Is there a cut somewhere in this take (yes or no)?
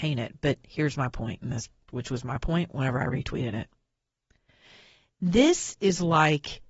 yes